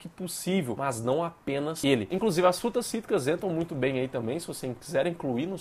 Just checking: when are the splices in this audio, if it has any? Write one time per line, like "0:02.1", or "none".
none